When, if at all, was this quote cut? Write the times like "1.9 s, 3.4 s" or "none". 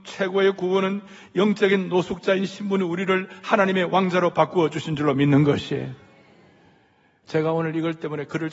7.2 s

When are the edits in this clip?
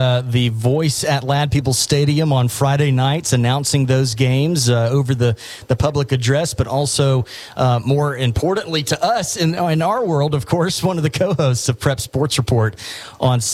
none

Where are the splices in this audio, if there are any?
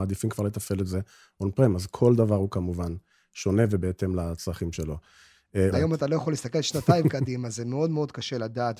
5.7 s

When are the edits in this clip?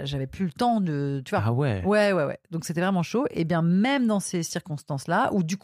none

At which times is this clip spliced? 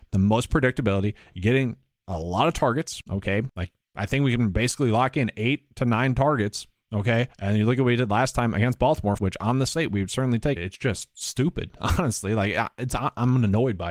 9.2 s, 10.6 s

